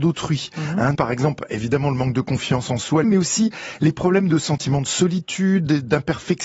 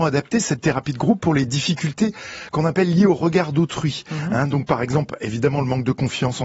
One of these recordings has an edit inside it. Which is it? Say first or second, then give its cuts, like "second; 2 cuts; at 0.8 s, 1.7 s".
first; 2 cuts; at 0.9 s, 3.0 s